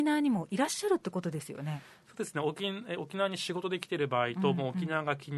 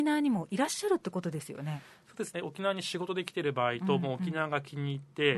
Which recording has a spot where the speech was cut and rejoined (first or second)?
second